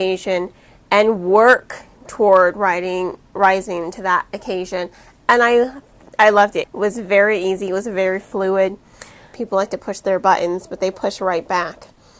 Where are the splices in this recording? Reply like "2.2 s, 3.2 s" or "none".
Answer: 6.6 s, 9.3 s